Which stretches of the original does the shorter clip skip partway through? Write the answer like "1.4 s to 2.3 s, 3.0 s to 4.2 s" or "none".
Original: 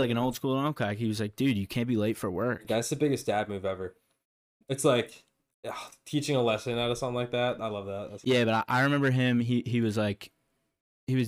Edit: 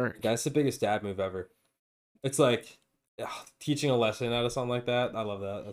none